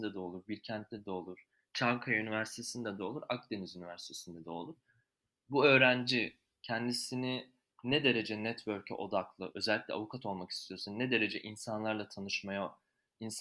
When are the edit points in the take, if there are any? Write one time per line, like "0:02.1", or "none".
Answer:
none